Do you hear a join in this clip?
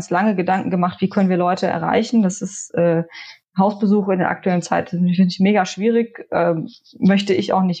no; 0 cuts

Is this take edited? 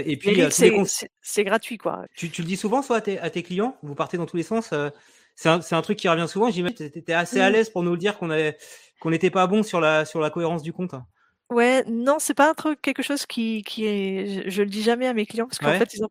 yes; 1 cut; at 2.1 s

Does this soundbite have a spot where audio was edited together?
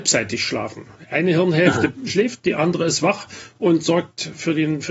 no; 0 cuts

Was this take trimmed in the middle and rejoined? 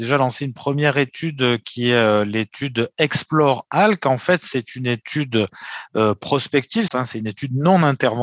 yes; 1 cut; at 6.9 s

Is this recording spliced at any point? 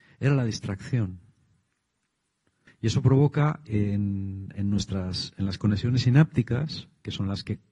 yes; 1 cut; at 2.7 s

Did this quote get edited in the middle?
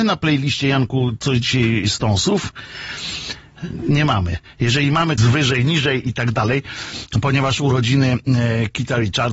yes; 1 cut; at 5.2 s

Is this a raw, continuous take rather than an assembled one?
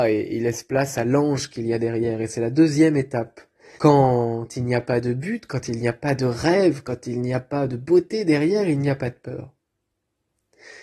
no; 1 cut; at 3.8 s

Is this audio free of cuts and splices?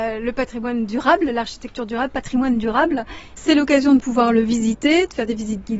no; 1 cut; at 3.4 s

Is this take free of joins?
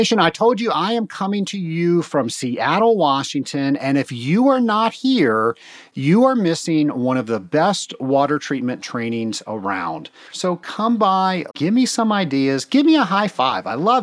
no; 2 cuts; at 10.3 s, 11.5 s

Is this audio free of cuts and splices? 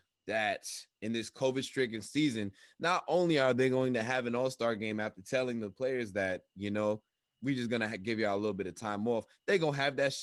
yes; 0 cuts

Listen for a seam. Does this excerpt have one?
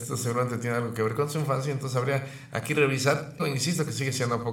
yes; 1 cut; at 3.4 s

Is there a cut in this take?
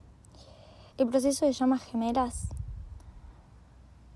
yes; 1 cut; at 0.9 s

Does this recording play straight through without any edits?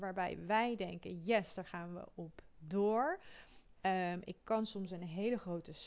yes; 0 cuts

